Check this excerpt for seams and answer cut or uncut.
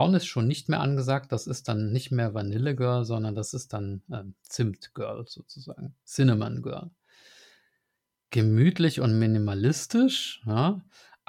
cut